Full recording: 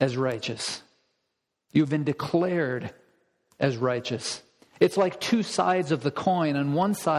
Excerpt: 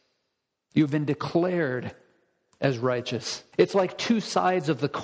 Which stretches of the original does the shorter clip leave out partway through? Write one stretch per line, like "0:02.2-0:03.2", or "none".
0:04.5-0:04.7